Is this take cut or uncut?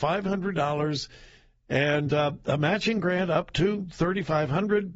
uncut